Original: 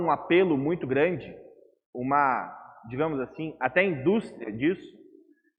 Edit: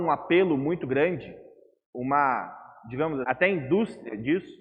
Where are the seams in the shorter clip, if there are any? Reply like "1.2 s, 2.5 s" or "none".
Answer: 3.2 s